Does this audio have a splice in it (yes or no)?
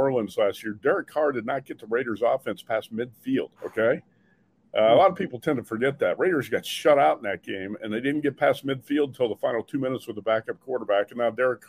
yes